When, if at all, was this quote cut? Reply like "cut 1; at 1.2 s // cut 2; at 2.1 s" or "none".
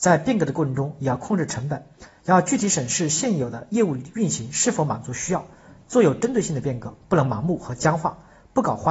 none